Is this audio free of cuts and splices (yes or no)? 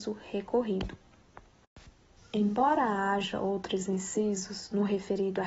no